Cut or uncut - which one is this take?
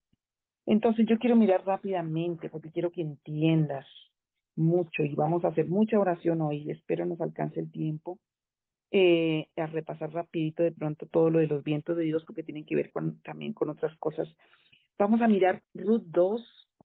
uncut